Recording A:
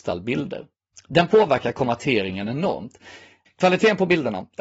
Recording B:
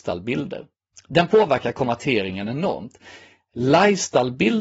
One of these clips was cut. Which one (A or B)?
A